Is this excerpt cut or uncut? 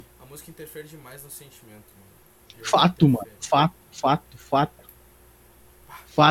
uncut